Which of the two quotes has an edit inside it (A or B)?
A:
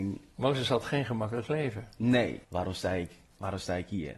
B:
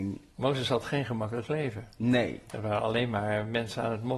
A